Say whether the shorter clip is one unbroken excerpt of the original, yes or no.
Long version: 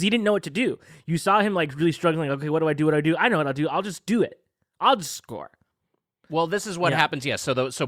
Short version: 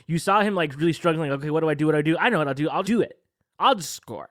no